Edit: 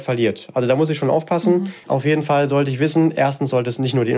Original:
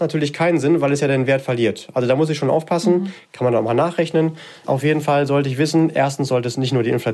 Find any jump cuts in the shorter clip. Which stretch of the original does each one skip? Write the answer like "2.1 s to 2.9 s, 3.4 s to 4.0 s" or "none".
3.2 s to 4.6 s